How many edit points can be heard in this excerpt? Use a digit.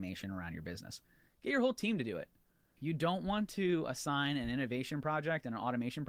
1